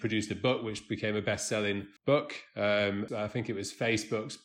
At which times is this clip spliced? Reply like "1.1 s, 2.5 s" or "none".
2.0 s, 3.1 s

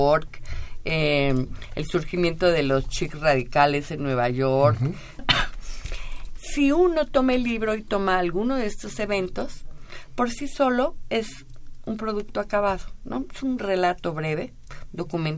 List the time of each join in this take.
5.2 s

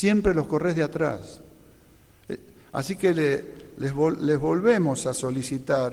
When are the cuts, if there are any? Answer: none

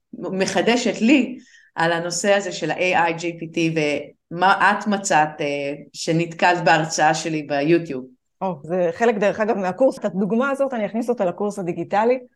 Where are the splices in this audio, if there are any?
8.6 s, 10.0 s

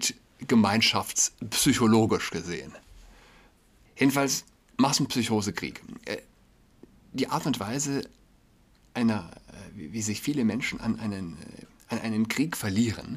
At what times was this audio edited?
none

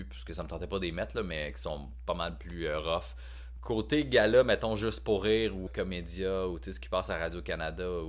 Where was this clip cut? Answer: 3.6 s, 5.7 s

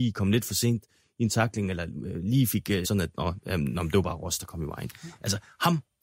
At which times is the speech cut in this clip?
2.8 s

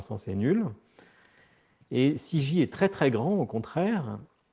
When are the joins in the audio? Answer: none

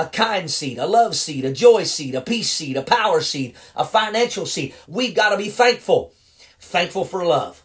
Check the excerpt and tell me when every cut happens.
4.8 s, 6.5 s

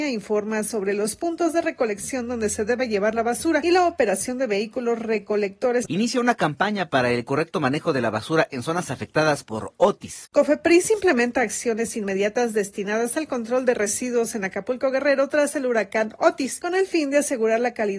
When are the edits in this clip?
5.9 s, 10.2 s

